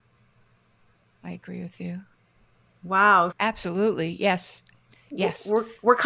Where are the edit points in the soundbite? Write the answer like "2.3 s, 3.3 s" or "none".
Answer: 3.3 s